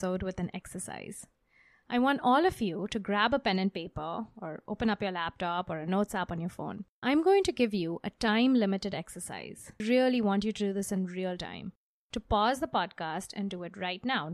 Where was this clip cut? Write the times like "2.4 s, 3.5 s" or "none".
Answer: 7.0 s, 9.8 s